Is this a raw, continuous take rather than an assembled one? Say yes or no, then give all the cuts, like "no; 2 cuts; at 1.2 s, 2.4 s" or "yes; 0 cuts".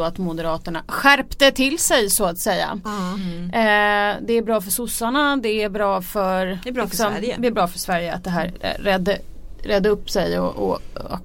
yes; 0 cuts